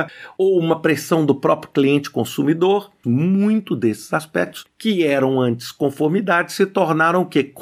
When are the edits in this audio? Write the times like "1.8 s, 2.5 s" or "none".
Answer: 3.0 s